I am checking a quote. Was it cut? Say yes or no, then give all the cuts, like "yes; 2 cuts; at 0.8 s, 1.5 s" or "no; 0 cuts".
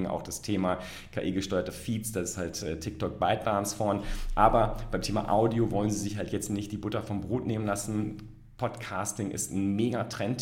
no; 0 cuts